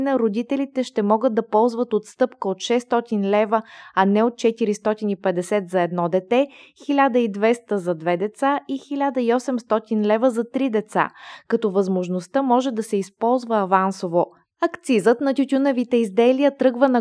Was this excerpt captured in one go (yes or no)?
yes